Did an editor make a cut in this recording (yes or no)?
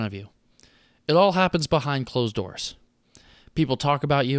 no